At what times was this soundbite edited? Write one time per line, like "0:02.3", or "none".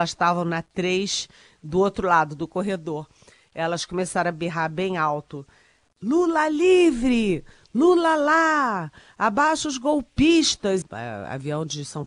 0:10.8